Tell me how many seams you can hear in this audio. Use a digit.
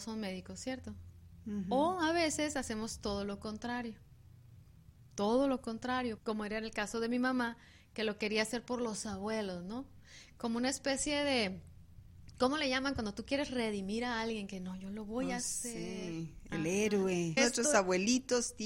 2